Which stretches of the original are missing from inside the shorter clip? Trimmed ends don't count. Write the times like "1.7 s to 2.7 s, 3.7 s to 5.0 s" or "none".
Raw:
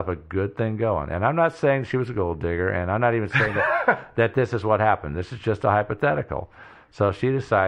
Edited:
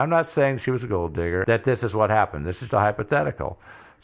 2.7 s to 4.1 s, 5.4 s to 5.6 s